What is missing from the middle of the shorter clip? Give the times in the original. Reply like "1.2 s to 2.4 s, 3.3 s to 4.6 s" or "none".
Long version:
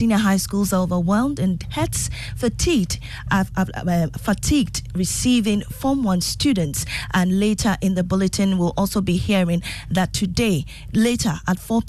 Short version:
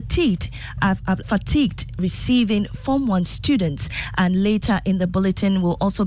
3.7 s to 4.2 s

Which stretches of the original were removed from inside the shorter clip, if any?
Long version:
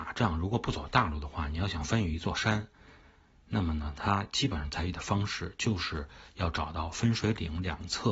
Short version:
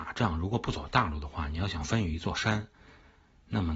none

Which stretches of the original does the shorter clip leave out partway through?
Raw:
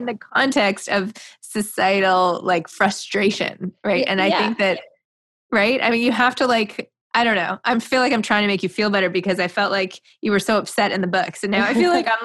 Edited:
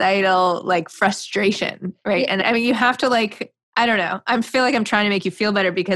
4.2 s to 5.8 s

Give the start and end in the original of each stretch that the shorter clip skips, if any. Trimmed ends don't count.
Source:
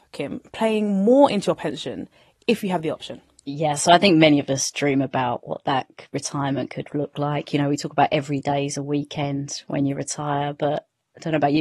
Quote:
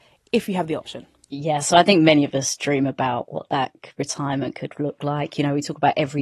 none

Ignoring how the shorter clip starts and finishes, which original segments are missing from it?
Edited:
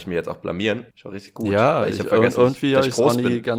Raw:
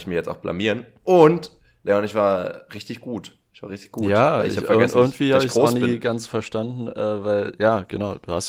0.9 s to 3.5 s

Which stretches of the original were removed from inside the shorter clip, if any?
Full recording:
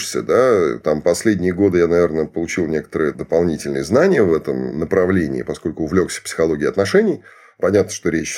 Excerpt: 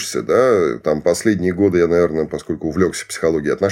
2.3 s to 5.4 s

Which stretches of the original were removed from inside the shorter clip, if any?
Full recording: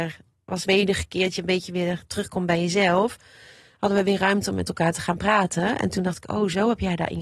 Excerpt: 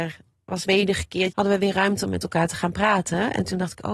1.3 s to 3.8 s

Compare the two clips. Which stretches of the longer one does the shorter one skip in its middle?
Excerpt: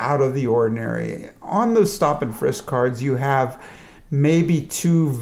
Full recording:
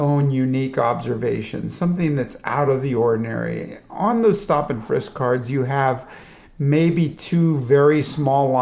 none

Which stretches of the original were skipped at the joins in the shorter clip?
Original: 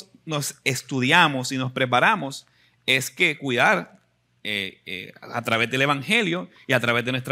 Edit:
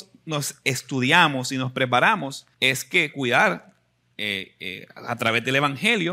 2.5 s to 2.8 s

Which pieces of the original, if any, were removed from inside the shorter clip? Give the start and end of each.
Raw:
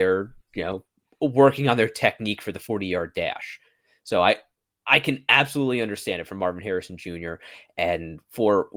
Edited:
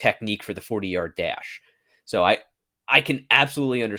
none

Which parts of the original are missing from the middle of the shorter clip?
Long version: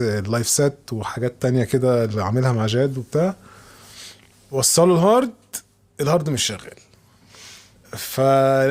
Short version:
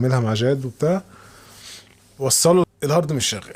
5.0 s to 5.8 s

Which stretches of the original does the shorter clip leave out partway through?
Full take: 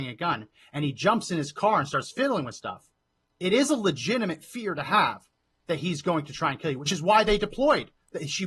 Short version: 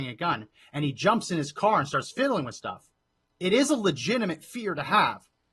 none

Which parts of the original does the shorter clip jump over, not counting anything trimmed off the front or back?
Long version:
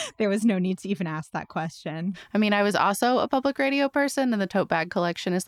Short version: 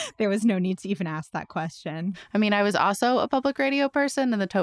none

